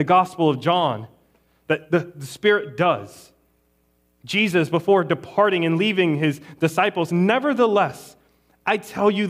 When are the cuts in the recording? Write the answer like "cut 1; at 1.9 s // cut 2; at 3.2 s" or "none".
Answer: cut 1; at 7.1 s